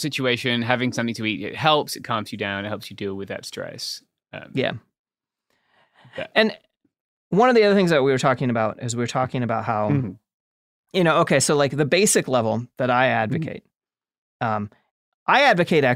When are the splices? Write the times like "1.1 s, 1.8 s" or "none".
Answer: none

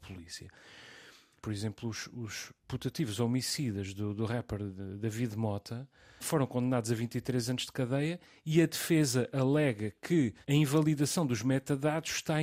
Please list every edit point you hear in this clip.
1.4 s, 6.2 s, 10.4 s

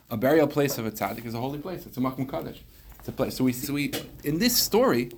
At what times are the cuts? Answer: 3.6 s

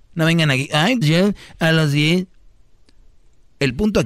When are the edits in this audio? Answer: 1.0 s

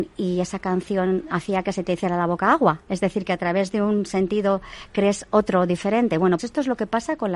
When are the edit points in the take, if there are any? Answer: 6.4 s

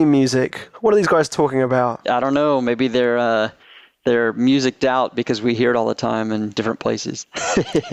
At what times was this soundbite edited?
none

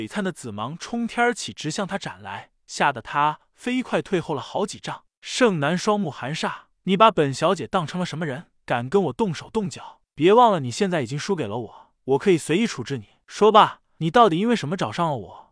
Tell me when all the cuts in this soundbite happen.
none

